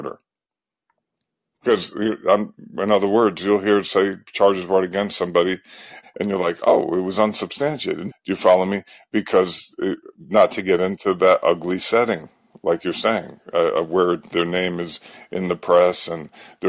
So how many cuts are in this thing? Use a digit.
2